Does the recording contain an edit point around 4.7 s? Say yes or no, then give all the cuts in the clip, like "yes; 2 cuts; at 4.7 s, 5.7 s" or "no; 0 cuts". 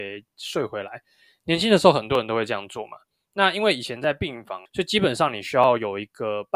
yes; 1 cut; at 4.7 s